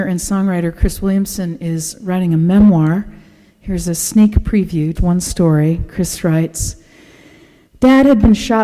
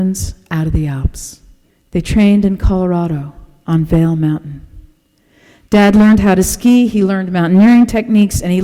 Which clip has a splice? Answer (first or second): first